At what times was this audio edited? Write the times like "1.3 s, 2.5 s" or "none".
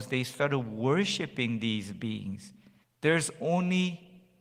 2.8 s